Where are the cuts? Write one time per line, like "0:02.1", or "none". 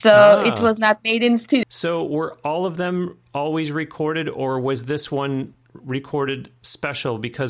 0:01.6